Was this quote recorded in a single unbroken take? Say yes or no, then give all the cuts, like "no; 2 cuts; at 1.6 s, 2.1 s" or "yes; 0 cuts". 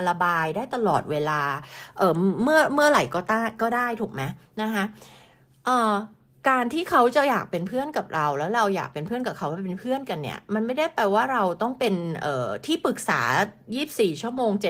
yes; 0 cuts